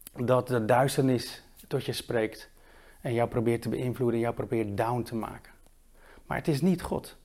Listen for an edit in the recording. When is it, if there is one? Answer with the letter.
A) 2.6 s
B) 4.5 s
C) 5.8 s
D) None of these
D